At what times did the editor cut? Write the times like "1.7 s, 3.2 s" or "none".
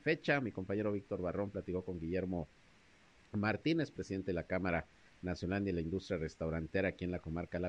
none